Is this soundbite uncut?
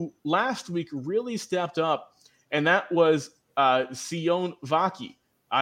yes; 0 cuts

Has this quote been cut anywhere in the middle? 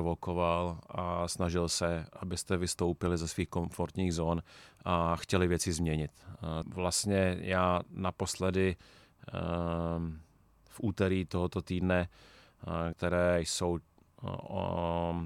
yes; 2 cuts; at 6.6 s, 12.9 s

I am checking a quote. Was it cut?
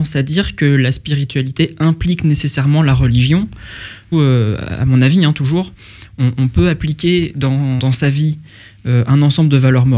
yes; 2 cuts; at 4.1 s, 7.8 s

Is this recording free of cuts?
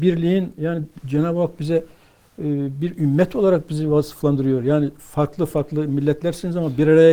yes; 0 cuts

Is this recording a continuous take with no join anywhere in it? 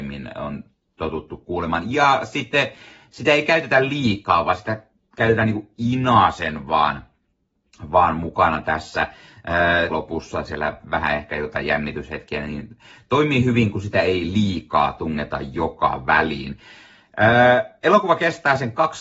no; 1 cut; at 9.9 s

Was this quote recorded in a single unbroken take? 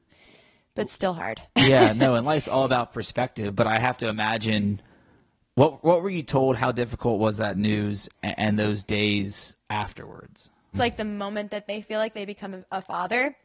no; 1 cut; at 10.7 s

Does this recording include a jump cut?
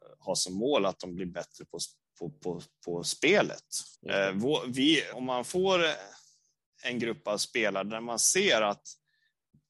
yes; 2 cuts; at 3.9 s, 5.1 s

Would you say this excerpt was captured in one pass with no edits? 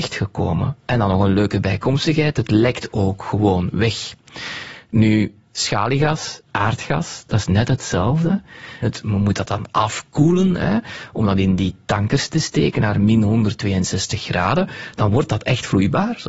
no; 1 cut; at 8.8 s

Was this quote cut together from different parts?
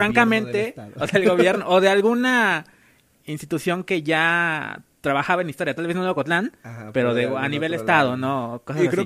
no; 0 cuts

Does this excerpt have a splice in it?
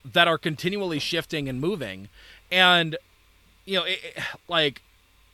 no; 0 cuts

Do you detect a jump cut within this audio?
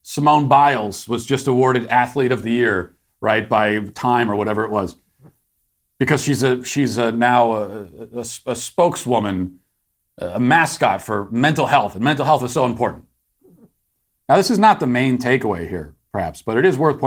no; 0 cuts

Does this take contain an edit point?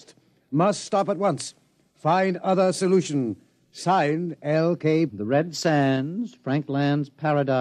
yes; 1 cut; at 5.1 s

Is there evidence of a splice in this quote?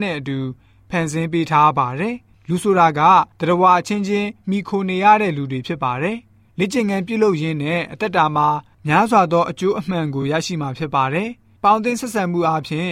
no; 0 cuts

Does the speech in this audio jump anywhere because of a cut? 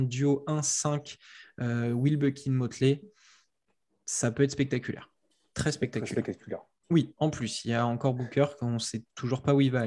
yes; 1 cut; at 6.8 s

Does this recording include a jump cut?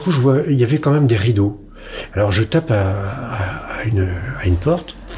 no; 0 cuts

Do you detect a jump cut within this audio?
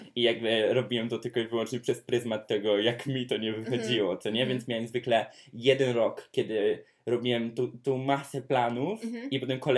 no; 0 cuts

